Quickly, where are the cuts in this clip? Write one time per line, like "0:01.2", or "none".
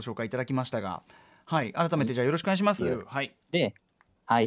0:02.8